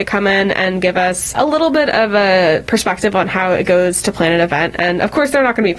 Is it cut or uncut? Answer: uncut